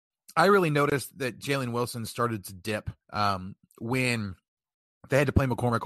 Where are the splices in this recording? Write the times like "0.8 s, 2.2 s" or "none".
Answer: 3.0 s